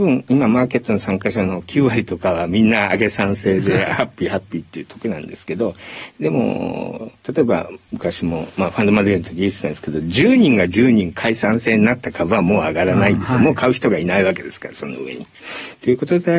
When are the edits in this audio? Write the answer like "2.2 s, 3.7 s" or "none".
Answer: none